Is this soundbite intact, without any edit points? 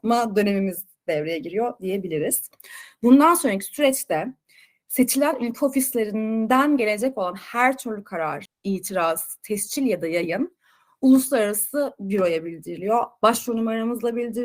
no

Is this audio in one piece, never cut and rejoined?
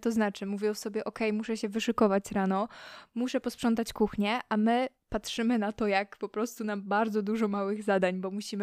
yes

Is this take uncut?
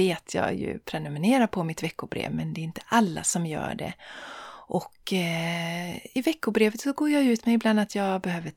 yes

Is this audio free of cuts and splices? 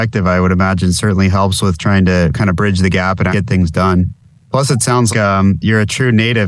no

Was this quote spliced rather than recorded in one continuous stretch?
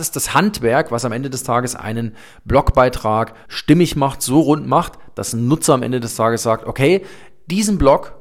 yes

